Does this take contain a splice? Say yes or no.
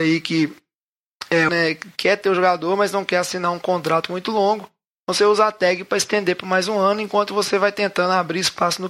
yes